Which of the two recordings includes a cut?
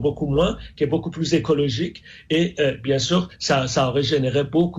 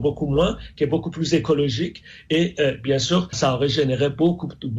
second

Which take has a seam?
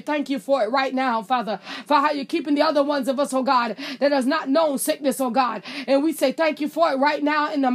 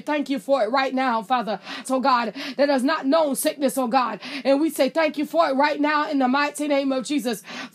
second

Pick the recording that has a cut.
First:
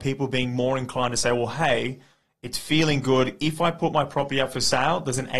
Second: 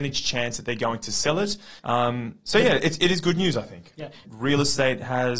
second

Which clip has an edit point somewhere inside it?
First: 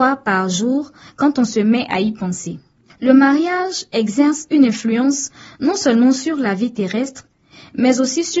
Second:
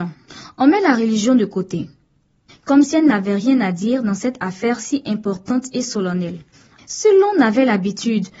second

